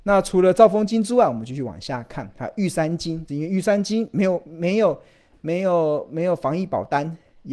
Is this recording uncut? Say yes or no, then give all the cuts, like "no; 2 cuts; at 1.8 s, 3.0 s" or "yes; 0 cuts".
no; 1 cut; at 3.3 s